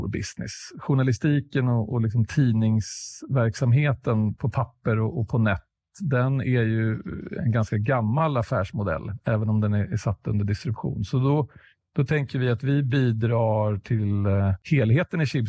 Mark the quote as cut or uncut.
uncut